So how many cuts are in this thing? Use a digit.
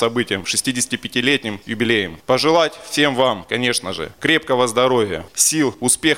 0